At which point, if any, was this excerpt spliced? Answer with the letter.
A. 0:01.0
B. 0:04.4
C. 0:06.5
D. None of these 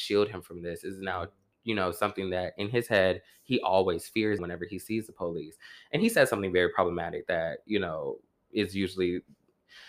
B